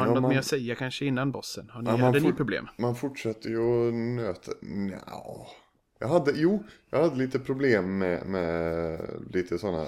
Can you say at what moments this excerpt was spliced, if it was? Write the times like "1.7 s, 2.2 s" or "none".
none